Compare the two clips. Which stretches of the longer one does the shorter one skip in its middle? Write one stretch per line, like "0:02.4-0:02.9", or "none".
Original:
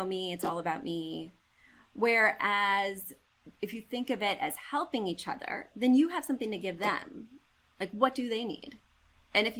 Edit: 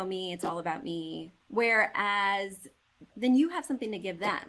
0:01.4-0:01.9
0:03.6-0:05.7